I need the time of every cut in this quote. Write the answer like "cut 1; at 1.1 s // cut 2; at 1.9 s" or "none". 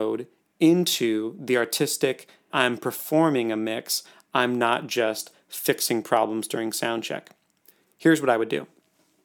cut 1; at 2.5 s